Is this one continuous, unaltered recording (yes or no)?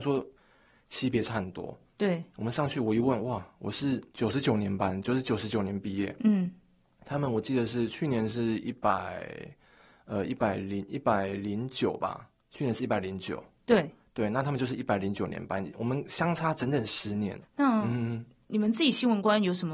no